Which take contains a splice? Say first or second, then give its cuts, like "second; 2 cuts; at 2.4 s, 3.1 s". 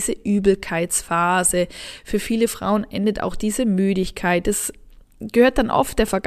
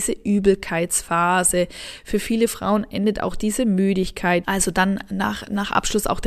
second; 1 cut; at 4.4 s